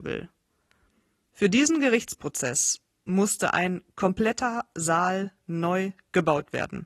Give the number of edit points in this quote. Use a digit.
1